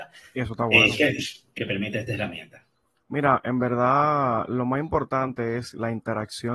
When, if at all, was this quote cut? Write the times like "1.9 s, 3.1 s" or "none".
1.6 s